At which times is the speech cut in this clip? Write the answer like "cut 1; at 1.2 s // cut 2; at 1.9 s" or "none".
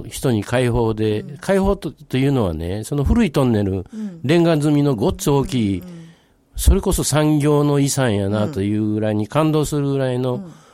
none